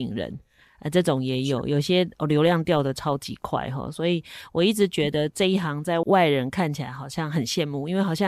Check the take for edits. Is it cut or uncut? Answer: uncut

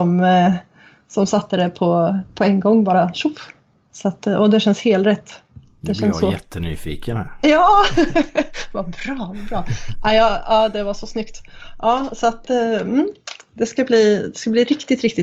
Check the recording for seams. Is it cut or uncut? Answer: uncut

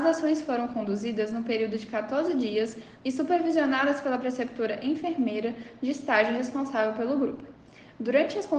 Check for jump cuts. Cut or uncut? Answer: cut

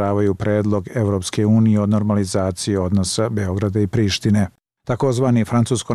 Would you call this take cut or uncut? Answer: uncut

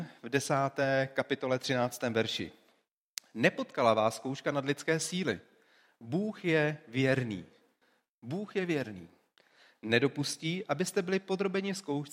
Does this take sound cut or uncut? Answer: uncut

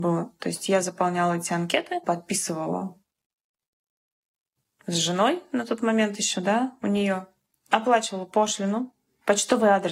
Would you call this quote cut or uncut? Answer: cut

